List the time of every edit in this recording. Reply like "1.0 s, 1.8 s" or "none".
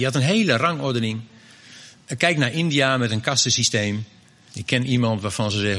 4.5 s